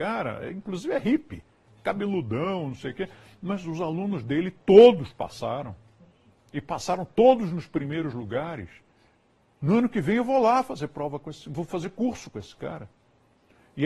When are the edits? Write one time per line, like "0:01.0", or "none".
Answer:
none

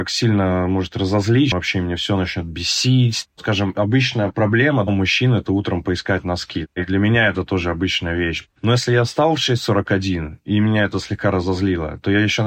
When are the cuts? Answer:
0:01.5

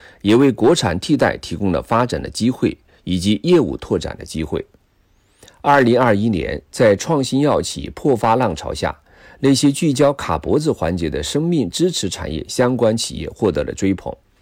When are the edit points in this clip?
none

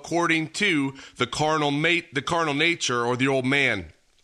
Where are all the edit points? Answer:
none

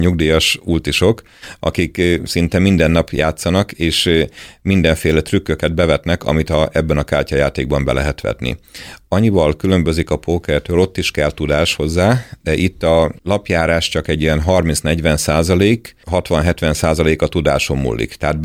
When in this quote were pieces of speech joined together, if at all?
none

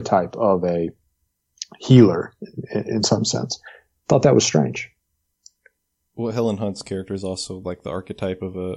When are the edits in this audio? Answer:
none

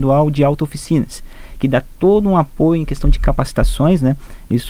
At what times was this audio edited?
none

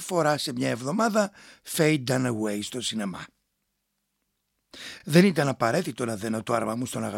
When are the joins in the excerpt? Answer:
none

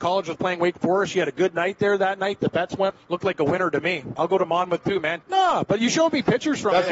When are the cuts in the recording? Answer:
0:02.9
0:04.2
0:05.2

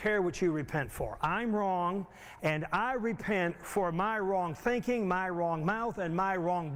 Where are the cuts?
0:02.4

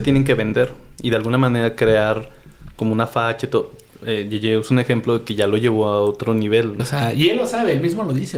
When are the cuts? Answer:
0:06.8

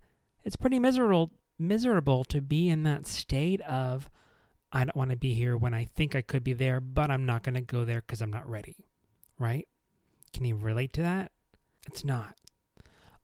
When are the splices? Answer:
0:11.8

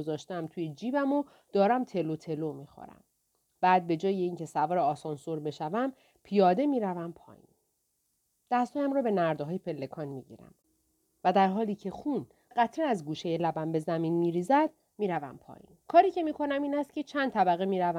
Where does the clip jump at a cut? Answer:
0:12.5
0:15.8

